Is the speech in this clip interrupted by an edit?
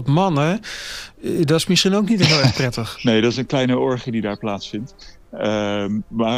no; 0 cuts

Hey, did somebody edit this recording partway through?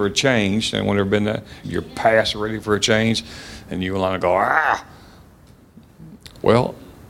yes; 1 cut; at 1.6 s

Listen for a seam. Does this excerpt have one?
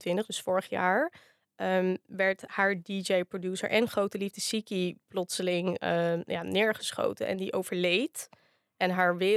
no; 0 cuts

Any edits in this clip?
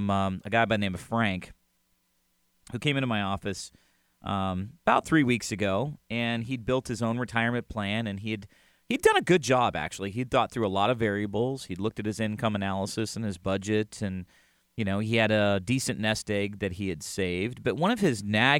no; 0 cuts

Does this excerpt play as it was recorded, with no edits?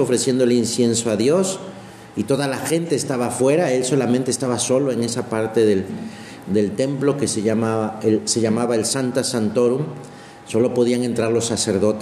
yes; 0 cuts

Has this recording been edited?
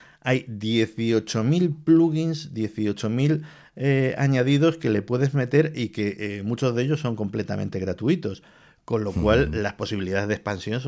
no; 0 cuts

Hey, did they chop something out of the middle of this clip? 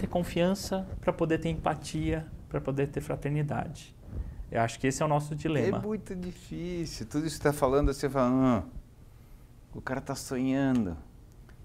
yes; 1 cut; at 4.5 s

